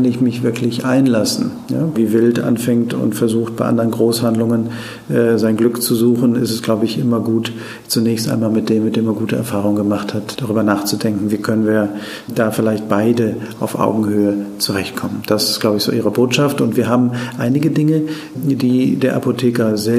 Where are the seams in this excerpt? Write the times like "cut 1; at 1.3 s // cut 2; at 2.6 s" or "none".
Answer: cut 1; at 1.9 s